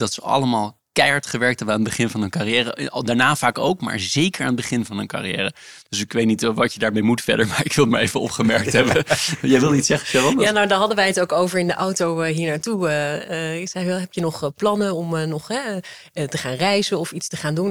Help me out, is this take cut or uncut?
uncut